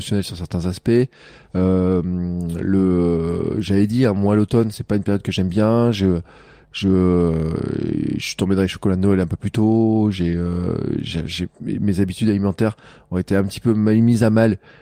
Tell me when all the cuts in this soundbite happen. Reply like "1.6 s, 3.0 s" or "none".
none